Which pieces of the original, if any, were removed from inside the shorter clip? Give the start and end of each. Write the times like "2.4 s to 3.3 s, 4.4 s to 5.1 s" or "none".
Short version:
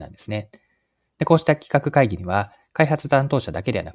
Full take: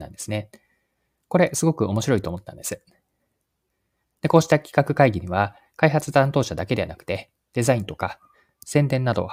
1.1 s to 4.1 s